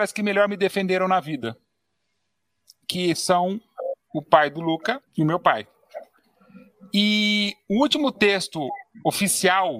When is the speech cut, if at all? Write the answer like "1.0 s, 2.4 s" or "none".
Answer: 5.1 s